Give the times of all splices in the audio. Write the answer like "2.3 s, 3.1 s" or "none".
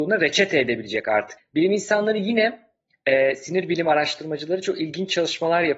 1.4 s